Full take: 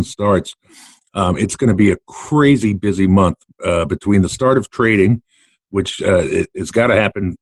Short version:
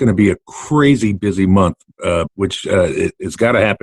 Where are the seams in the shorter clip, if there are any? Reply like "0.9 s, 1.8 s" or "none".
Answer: 2.3 s